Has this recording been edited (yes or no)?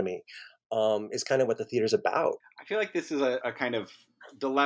yes